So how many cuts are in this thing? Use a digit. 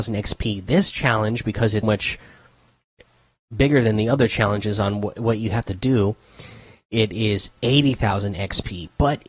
1